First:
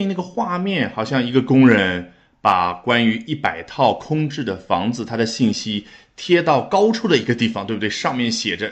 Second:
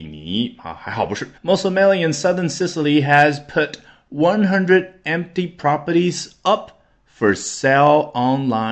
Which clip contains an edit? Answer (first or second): second